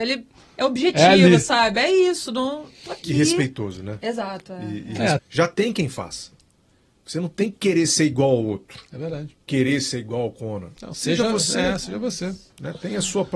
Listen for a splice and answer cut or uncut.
cut